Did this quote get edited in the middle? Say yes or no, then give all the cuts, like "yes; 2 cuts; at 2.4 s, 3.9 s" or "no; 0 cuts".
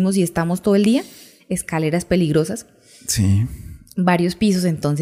no; 0 cuts